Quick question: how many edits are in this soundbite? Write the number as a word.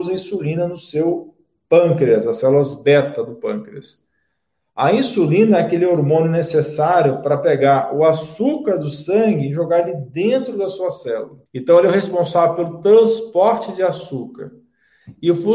one